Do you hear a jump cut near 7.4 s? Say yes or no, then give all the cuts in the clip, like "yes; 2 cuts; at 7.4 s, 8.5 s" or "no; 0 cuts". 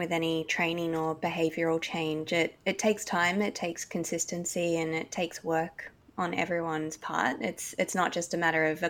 no; 0 cuts